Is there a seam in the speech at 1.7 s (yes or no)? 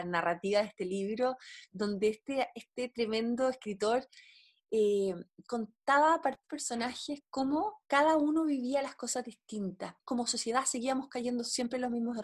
no